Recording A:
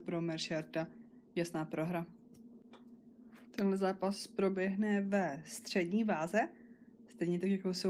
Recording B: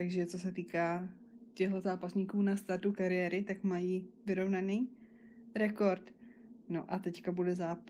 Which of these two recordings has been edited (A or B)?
B